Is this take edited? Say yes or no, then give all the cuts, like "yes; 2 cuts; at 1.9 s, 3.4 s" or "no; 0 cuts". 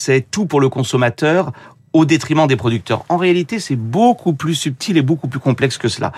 no; 0 cuts